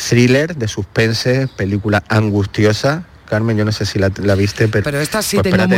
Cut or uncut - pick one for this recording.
cut